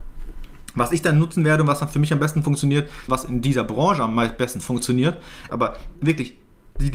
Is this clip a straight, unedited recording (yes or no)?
no